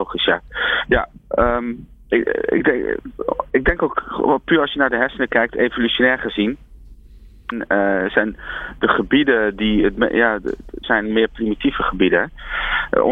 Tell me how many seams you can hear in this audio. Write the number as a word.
two